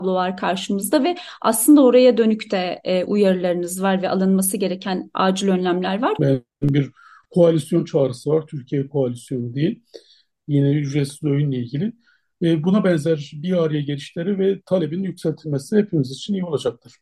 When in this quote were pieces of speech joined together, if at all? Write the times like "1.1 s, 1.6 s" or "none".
6.2 s